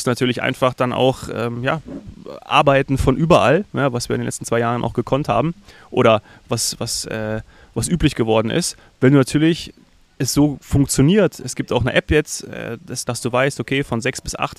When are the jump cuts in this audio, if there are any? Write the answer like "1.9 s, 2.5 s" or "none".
13.1 s